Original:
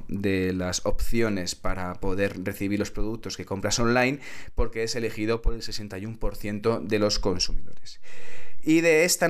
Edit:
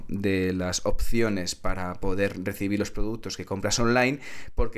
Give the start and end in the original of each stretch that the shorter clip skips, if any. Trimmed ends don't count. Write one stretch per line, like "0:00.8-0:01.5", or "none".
none